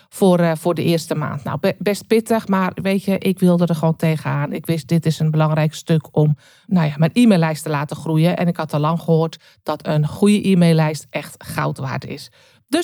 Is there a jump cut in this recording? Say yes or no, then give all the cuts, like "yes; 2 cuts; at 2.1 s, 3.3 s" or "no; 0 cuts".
no; 0 cuts